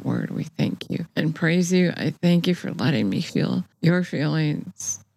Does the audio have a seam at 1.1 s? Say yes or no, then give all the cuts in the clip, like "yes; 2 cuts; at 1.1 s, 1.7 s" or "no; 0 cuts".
yes; 2 cuts; at 1.1 s, 3.7 s